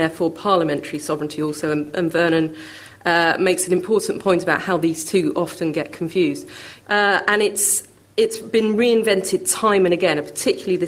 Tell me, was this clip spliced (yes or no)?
yes